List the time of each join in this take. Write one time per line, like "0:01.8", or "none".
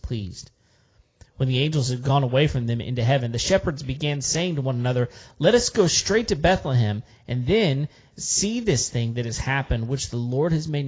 none